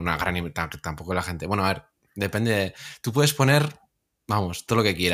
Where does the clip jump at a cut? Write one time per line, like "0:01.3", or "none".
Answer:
none